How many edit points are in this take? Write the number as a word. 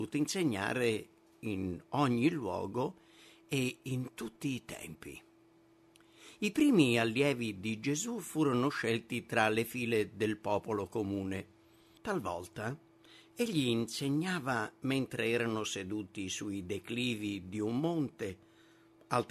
one